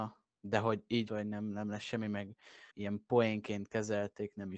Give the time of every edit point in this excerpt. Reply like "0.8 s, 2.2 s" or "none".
1.1 s, 2.7 s